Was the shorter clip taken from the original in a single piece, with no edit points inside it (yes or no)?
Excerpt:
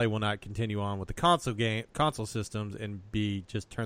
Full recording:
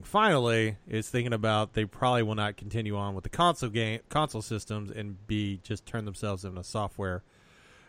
yes